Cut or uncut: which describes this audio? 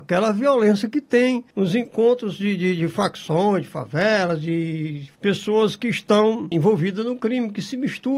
uncut